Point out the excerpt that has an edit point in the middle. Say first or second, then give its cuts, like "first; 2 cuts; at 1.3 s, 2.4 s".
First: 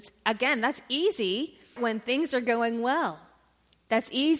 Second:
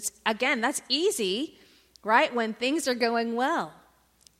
first; 1 cut; at 1.8 s